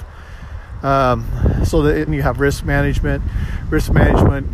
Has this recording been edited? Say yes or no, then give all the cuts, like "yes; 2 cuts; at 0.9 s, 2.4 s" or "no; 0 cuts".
yes; 1 cut; at 2.1 s